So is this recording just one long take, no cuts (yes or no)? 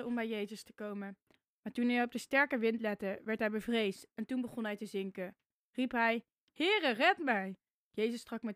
yes